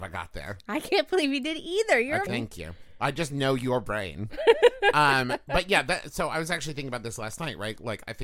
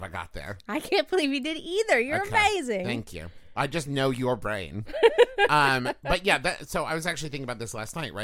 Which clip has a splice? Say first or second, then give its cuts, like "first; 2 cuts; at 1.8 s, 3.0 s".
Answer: first; 1 cut; at 2.3 s